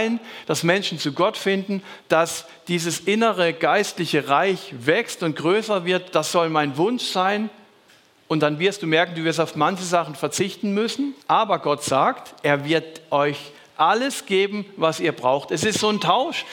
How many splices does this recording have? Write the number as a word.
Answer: one